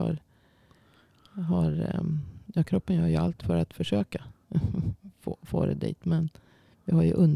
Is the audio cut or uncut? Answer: cut